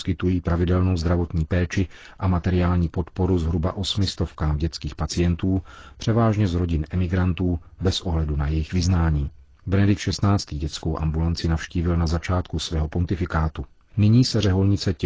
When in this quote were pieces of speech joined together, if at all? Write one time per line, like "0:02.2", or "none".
none